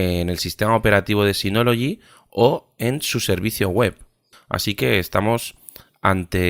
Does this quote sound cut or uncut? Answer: cut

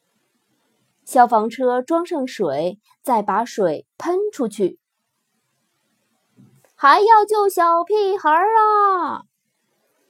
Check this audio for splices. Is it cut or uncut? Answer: cut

